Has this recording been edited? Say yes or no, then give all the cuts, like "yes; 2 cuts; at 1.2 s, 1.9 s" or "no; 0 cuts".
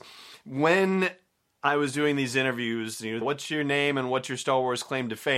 yes; 1 cut; at 3.2 s